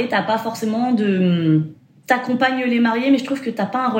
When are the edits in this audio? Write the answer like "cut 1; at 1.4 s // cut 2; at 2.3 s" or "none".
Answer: none